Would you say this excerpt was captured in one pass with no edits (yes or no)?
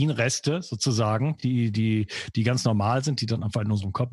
yes